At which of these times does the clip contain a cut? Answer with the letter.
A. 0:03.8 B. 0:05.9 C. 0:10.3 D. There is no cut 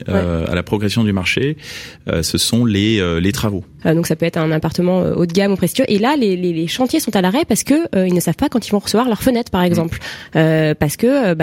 A